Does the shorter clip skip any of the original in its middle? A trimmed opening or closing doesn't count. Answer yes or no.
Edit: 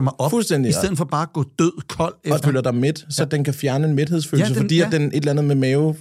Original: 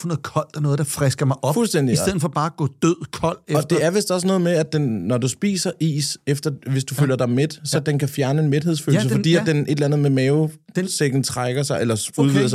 yes